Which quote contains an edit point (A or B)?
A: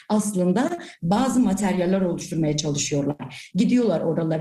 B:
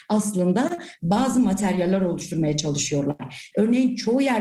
B